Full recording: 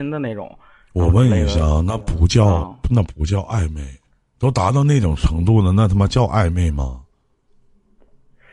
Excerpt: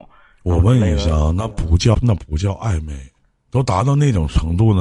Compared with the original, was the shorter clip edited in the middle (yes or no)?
yes